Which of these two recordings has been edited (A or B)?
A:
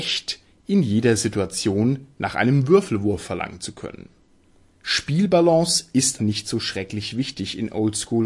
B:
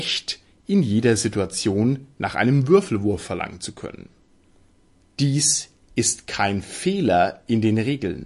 A